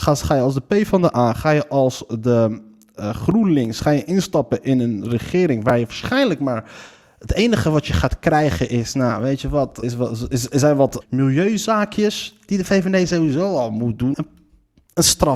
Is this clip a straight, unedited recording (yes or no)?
no